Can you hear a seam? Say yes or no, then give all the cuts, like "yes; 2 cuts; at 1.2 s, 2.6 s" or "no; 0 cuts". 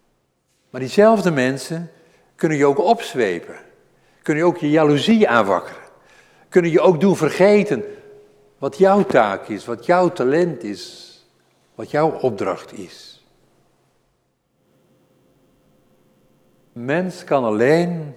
no; 0 cuts